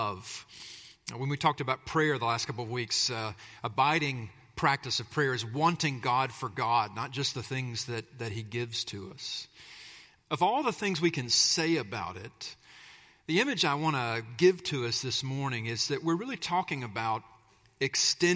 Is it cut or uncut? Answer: cut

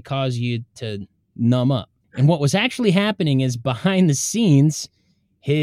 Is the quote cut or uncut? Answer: cut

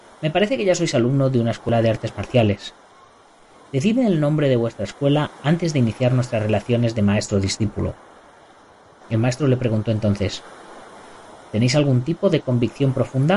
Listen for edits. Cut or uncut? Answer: cut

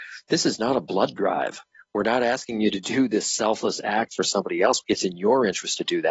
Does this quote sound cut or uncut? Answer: cut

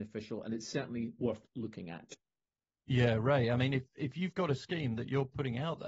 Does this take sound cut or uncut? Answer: uncut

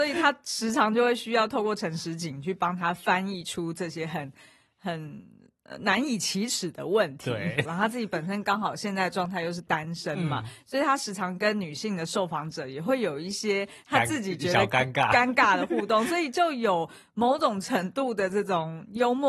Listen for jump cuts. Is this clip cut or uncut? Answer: cut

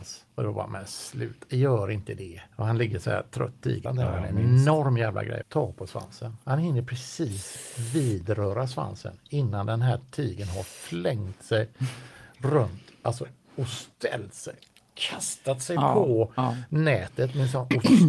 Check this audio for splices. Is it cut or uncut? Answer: cut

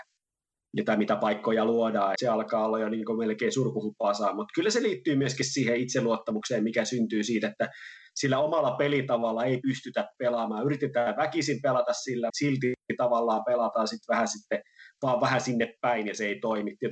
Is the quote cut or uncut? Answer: cut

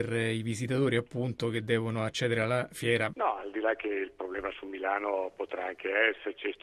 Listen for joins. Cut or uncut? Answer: cut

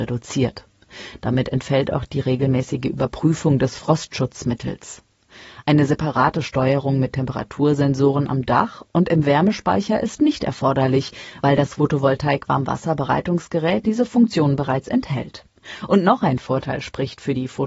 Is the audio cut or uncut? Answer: uncut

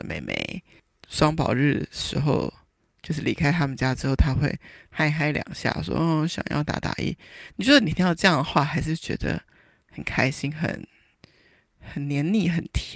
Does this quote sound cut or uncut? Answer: uncut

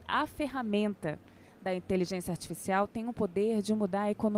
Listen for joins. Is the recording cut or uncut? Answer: uncut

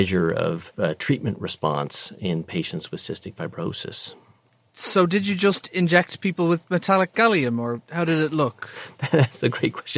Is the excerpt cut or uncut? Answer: uncut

